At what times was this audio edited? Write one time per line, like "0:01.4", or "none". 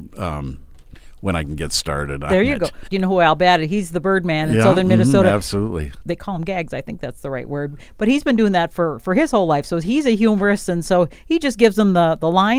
0:02.9
0:06.0